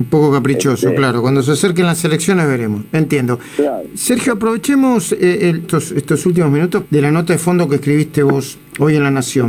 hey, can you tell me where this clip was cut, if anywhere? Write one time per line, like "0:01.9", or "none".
0:05.6
0:06.8